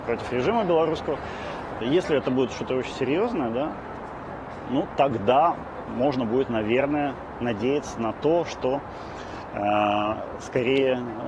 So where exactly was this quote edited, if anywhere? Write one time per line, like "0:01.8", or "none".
0:01.8